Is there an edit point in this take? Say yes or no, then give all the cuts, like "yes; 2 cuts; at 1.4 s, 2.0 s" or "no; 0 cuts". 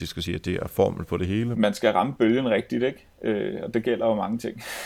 yes; 1 cut; at 1.5 s